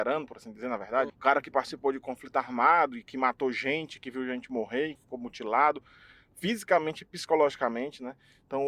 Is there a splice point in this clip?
yes; 2 cuts; at 1.1 s, 5.0 s

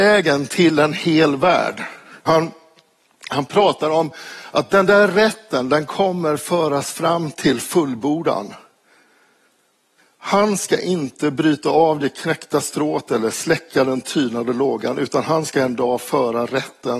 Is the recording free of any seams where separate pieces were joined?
no; 1 cut; at 2.3 s

